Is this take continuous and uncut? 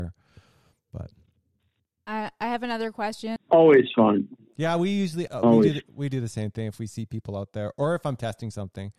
no; 2 cuts; at 3.4 s, 5.3 s

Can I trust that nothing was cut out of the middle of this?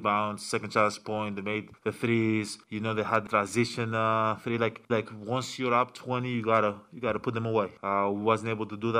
no; 1 cut; at 4.9 s

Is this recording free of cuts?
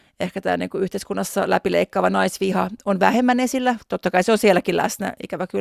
yes; 0 cuts

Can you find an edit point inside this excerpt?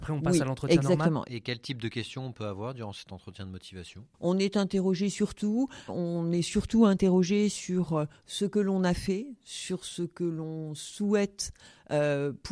yes; 2 cuts; at 1.2 s, 5.9 s

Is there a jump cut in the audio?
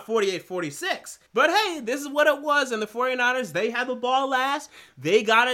yes; 1 cut; at 1.3 s

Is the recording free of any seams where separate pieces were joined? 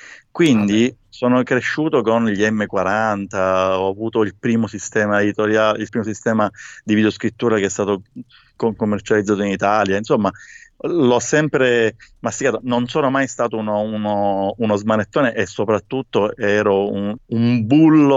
no; 2 cuts; at 5.9 s, 17.2 s

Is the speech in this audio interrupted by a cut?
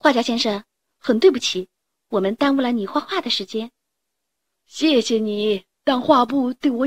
yes; 2 cuts; at 4.6 s, 5.7 s

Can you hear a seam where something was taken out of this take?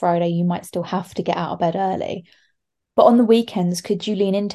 no; 0 cuts

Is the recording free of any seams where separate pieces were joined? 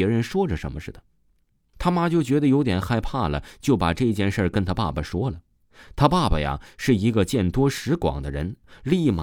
no; 1 cut; at 1.7 s

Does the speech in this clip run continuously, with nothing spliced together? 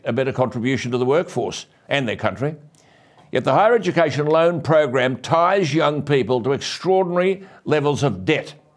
yes; 0 cuts

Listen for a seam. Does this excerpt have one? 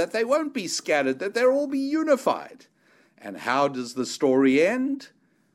no; 0 cuts

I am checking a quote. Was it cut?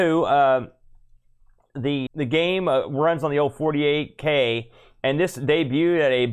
yes; 1 cut; at 2.1 s

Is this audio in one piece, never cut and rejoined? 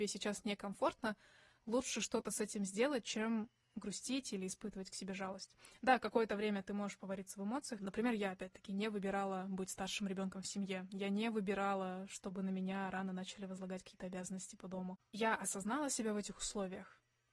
no; 1 cut; at 7.8 s

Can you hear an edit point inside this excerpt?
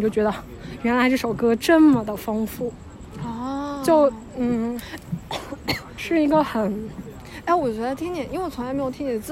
no; 0 cuts

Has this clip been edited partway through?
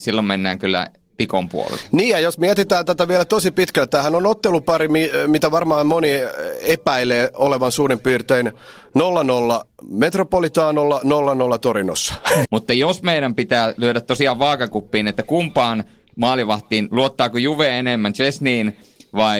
yes; 1 cut; at 12.4 s

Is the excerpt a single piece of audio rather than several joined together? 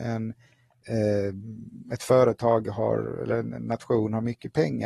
yes; 0 cuts

